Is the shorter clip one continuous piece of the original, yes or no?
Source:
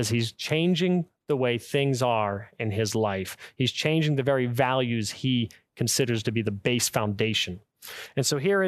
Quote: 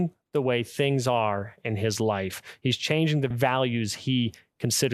no